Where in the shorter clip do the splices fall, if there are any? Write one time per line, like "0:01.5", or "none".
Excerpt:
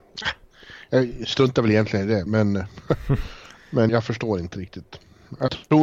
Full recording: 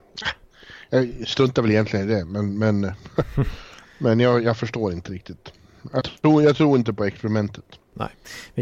0:02.3
0:03.9